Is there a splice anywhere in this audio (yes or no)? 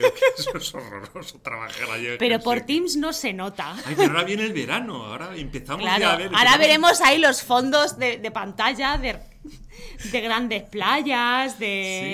no